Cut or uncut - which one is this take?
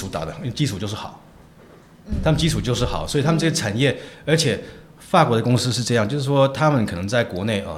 uncut